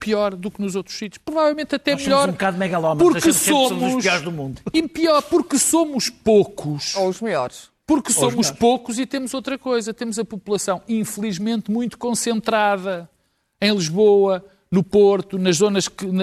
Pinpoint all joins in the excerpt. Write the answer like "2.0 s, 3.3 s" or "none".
none

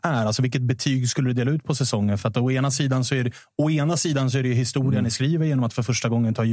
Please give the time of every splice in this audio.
none

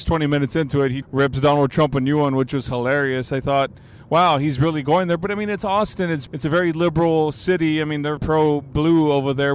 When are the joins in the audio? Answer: 1.0 s, 6.3 s, 8.2 s

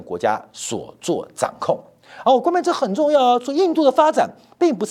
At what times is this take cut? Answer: none

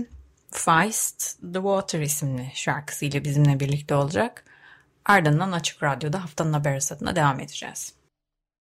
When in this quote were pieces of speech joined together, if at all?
none

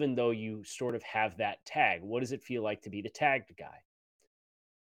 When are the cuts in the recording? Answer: none

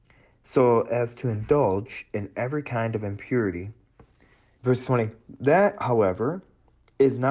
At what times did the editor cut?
4.6 s

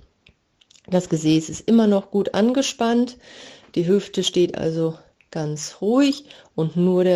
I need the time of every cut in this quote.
none

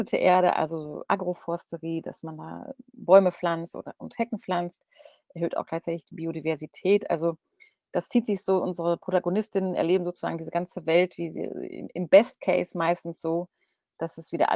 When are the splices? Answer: none

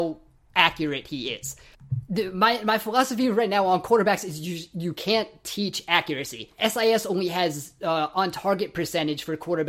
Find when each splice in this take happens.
none

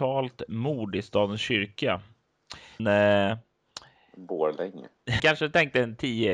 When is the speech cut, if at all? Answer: 2.8 s, 5.2 s

